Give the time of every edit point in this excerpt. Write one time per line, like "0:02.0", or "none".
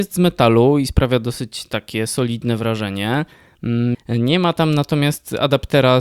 0:03.9